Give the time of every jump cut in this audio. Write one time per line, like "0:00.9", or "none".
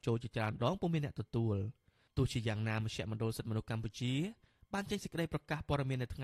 none